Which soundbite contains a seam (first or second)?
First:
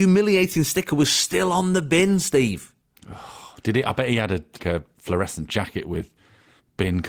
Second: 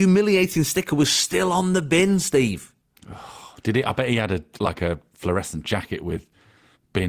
first